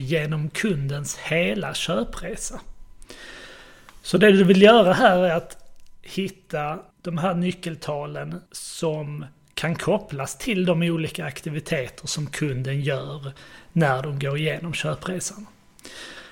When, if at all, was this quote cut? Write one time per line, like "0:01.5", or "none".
0:06.9
0:08.5